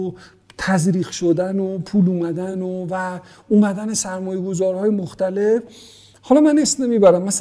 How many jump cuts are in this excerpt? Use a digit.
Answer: 0